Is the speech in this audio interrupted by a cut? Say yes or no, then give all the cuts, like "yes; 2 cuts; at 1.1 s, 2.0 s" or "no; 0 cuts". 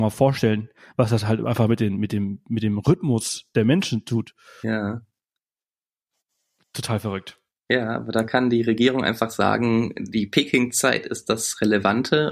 no; 0 cuts